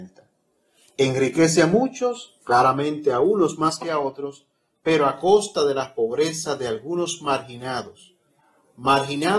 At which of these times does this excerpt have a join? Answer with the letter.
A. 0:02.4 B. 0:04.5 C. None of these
A